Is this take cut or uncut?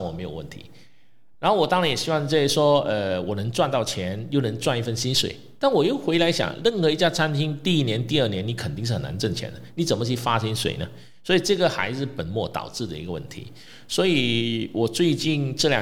uncut